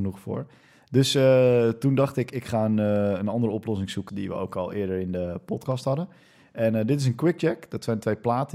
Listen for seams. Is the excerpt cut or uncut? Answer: cut